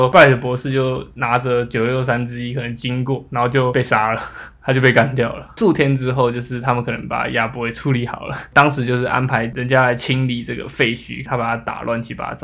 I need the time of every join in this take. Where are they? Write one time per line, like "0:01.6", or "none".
none